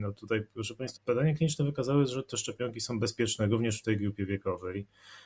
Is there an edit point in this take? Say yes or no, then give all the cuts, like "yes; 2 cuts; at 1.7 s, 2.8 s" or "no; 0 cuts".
yes; 1 cut; at 1.0 s